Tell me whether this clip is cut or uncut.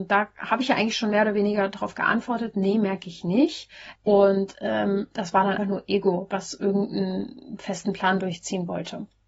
cut